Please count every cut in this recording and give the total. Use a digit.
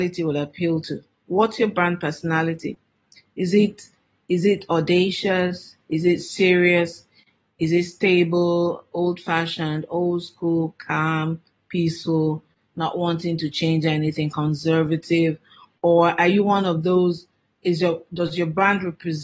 0